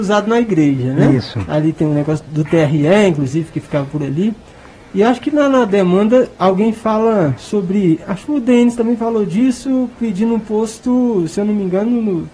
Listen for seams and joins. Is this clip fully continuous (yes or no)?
yes